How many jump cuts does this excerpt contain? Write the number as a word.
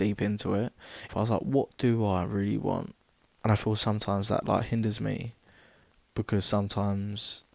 two